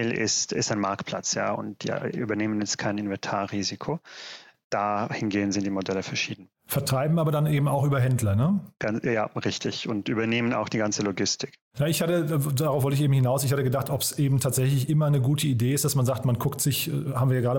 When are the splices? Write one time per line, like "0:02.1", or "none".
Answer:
none